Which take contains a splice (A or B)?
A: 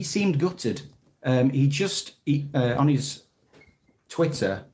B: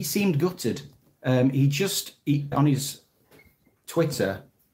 B